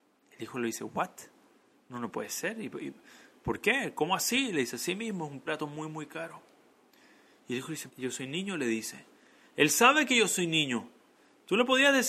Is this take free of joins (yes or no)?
no